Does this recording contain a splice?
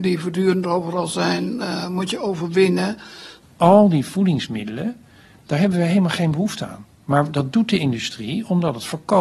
no; 0 cuts

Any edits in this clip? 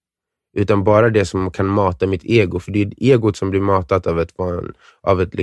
no; 0 cuts

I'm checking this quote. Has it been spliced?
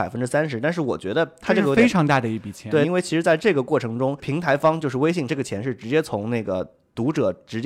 yes; 2 cuts; at 2.8 s, 5.3 s

